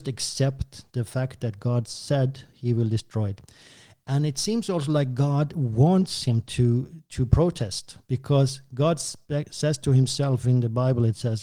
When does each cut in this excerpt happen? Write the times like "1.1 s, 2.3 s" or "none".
none